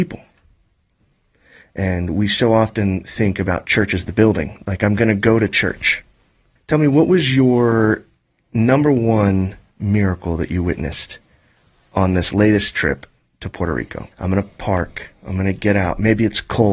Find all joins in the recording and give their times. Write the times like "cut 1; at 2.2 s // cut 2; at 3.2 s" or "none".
cut 1; at 6.6 s // cut 2; at 14.1 s